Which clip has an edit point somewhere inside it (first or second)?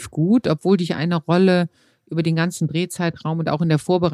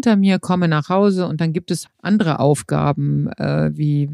second